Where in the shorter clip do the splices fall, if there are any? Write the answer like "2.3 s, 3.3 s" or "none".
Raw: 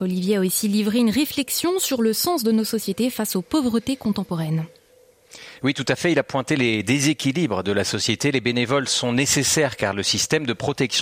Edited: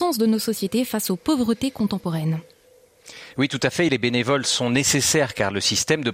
3.9 s